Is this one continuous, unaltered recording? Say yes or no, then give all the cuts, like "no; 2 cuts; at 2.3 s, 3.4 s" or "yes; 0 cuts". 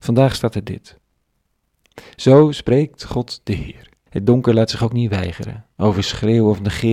no; 1 cut; at 4.1 s